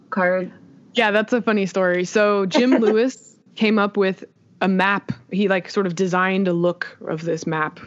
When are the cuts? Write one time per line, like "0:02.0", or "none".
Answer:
none